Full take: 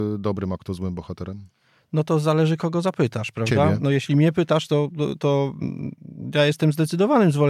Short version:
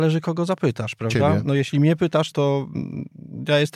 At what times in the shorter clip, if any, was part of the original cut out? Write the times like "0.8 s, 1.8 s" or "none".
2.3 s